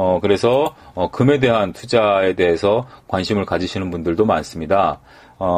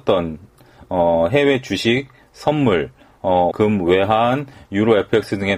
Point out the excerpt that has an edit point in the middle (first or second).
second